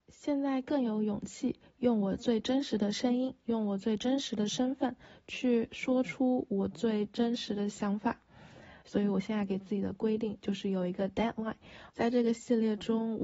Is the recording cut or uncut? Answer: cut